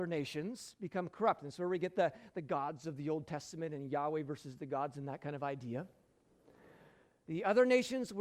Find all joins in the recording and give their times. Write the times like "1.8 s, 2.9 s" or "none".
7.2 s